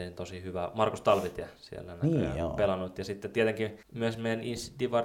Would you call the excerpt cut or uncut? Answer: cut